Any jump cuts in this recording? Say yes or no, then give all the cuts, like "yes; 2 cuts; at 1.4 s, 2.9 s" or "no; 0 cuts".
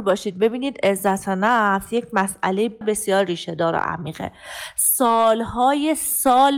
yes; 1 cut; at 2.8 s